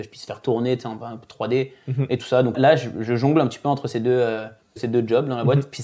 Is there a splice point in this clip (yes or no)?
yes